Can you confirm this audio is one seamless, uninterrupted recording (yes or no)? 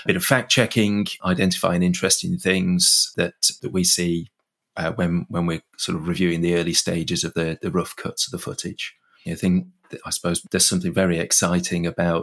no